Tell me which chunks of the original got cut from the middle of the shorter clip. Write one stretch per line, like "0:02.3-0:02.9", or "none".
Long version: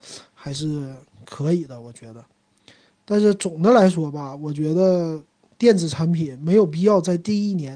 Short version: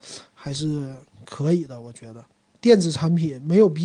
0:02.5-0:05.5